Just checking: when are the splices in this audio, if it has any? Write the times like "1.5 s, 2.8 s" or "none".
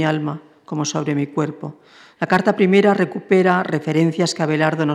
2.2 s